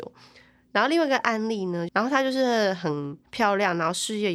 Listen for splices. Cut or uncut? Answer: cut